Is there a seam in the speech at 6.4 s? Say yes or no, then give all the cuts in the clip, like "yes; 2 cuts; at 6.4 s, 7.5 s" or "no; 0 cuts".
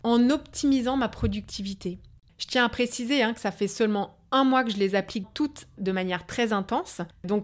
no; 2 cuts; at 2.3 s, 5.2 s